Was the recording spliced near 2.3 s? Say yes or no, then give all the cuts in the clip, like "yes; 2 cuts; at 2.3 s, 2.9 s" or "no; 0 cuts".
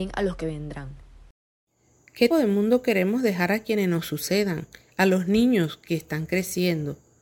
yes; 1 cut; at 2.3 s